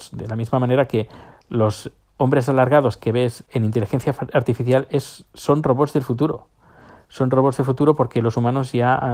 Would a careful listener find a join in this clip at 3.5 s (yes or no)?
yes